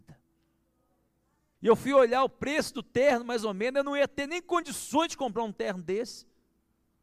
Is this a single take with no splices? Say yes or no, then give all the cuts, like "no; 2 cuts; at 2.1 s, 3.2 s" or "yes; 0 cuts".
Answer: no; 1 cut; at 1.5 s